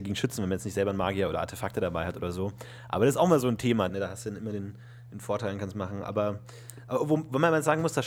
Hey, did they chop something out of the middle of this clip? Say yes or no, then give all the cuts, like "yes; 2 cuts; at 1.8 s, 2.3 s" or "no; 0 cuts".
yes; 1 cut; at 3.9 s